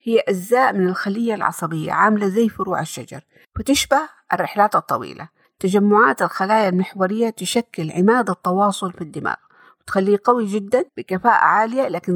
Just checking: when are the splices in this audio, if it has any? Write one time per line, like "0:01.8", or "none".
0:10.9

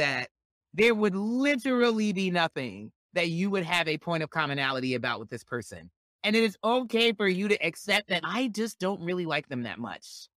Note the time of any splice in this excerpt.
none

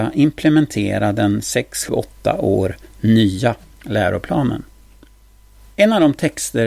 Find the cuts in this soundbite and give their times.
0:01.9

